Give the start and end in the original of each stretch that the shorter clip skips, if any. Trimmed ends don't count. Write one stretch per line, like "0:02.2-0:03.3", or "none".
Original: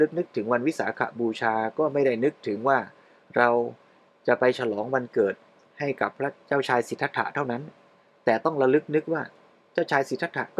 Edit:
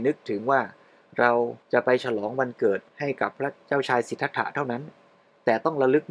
0:03.8-0:04.2
0:05.4-0:05.7